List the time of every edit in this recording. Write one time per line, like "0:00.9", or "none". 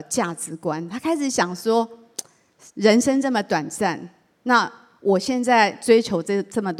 none